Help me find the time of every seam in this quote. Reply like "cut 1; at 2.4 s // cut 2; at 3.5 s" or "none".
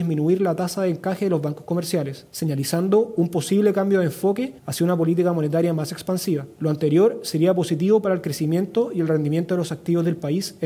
none